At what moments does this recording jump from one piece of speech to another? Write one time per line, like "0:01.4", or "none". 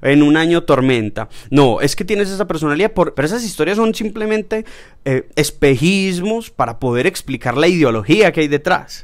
0:03.1